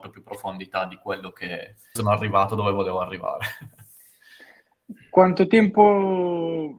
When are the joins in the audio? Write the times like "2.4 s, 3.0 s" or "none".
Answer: 2.0 s